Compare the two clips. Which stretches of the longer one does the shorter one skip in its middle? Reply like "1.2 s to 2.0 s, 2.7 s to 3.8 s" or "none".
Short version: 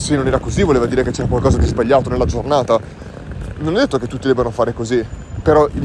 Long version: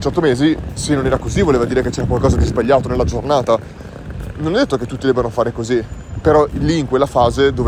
none